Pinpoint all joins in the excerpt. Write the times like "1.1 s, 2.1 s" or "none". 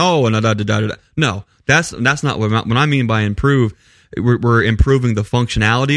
none